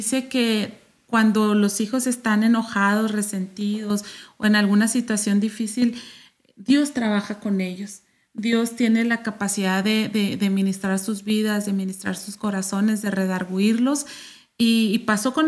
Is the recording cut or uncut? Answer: uncut